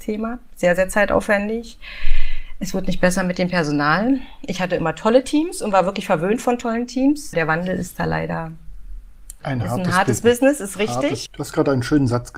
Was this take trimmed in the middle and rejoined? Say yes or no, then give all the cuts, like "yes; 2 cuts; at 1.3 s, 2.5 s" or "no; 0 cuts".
yes; 3 cuts; at 7.3 s, 9.4 s, 11.3 s